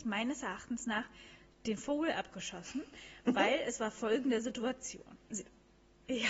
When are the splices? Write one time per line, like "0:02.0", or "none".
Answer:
0:05.3